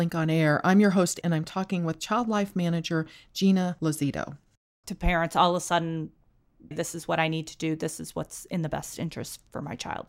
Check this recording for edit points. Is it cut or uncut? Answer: cut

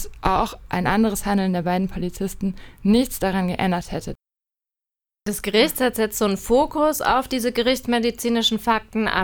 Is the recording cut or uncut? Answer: uncut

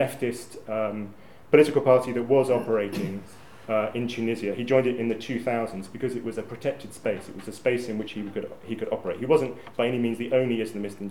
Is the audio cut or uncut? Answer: uncut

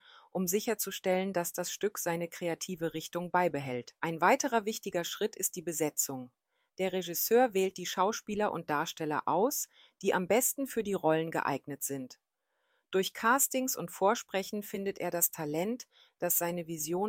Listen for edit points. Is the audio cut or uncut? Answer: cut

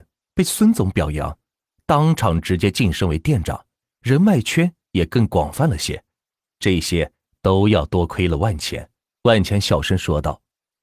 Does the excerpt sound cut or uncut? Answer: cut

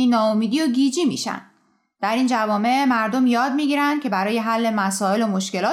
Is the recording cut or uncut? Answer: uncut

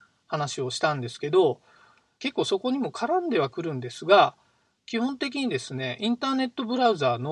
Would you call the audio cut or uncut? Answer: uncut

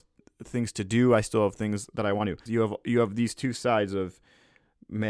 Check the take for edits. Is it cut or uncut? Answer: cut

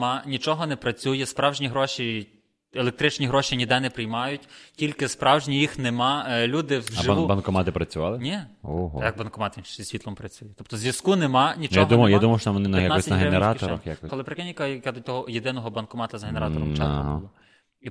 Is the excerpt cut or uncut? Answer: cut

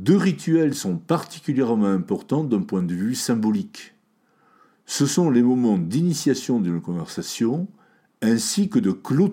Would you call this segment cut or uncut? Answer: uncut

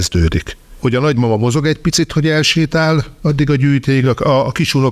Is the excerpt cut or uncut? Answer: uncut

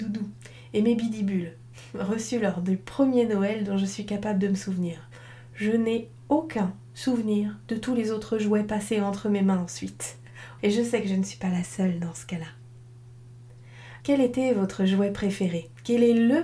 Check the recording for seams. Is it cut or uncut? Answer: cut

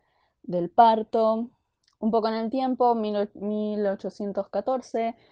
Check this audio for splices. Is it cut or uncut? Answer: uncut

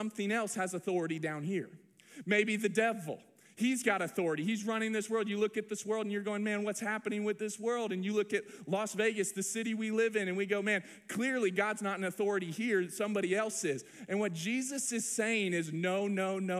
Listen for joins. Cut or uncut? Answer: uncut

